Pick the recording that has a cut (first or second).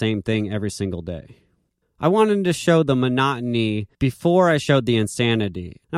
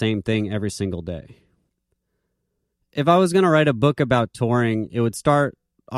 first